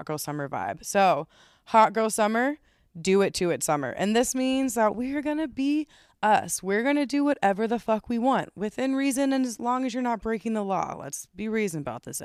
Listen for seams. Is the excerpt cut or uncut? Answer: uncut